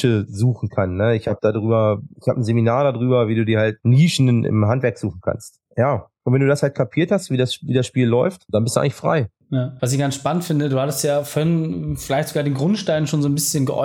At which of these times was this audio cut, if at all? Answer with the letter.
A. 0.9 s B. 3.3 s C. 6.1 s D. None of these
D